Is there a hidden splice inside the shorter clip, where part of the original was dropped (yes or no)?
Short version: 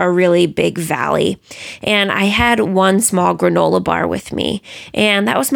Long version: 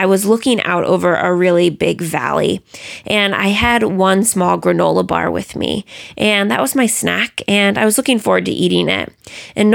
no